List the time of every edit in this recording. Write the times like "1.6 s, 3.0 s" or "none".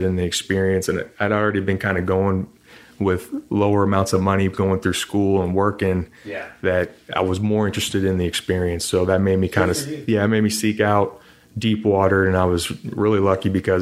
none